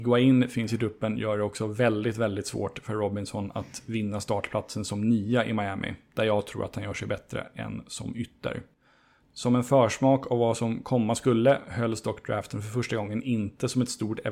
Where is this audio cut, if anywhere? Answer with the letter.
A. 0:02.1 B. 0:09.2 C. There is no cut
B